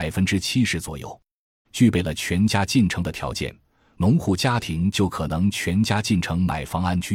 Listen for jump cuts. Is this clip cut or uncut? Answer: cut